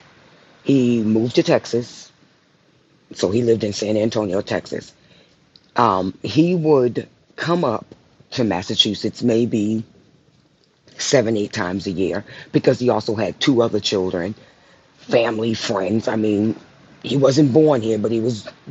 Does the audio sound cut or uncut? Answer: uncut